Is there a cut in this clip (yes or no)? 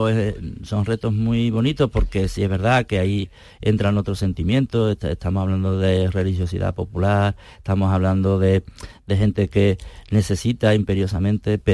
no